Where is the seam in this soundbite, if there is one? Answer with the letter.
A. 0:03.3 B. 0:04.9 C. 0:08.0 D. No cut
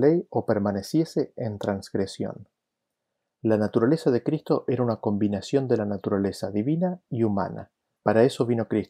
C